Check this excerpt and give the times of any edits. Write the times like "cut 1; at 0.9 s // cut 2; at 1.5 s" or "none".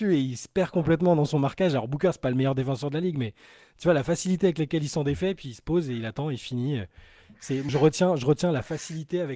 cut 1; at 7.7 s